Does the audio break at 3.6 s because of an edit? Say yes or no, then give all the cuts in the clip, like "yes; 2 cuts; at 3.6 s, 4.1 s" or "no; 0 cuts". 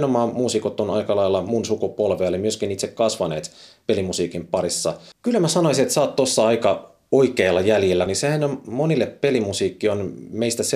no; 2 cuts; at 5.1 s, 8.1 s